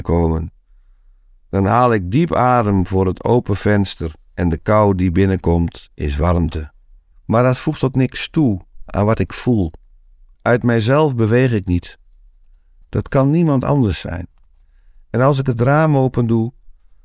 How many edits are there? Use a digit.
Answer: 3